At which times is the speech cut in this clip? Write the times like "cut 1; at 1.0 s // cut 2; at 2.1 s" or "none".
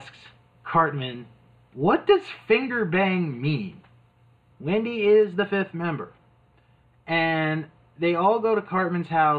cut 1; at 4.5 s